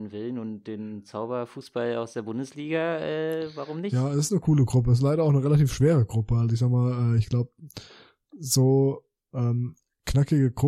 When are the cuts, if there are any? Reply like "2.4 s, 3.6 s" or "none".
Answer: none

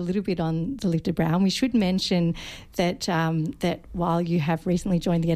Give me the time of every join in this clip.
none

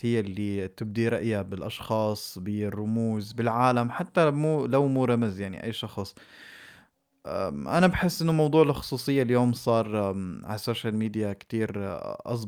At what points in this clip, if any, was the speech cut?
none

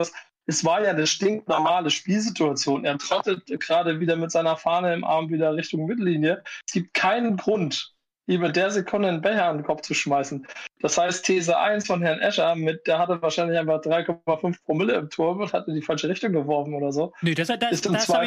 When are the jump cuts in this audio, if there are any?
none

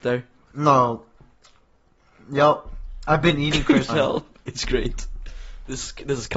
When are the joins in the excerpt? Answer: 3.9 s

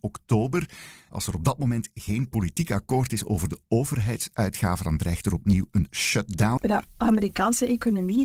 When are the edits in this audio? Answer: 1.1 s, 6.6 s

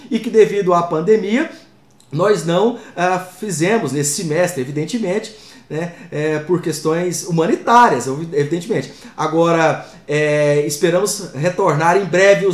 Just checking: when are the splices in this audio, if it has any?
none

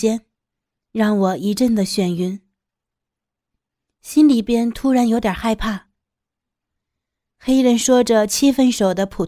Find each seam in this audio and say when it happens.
none

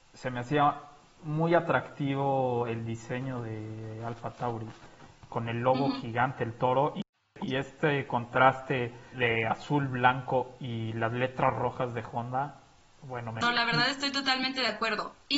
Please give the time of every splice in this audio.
9.1 s, 13.4 s

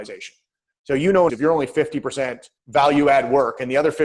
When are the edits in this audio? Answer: 1.3 s, 2.6 s

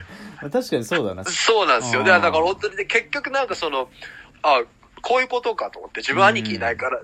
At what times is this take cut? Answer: 1.3 s, 4.3 s

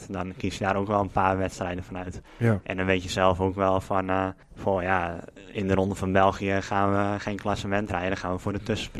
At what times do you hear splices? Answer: 4.4 s

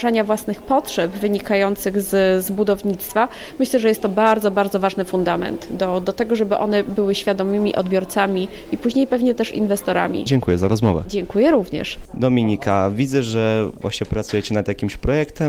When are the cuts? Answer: none

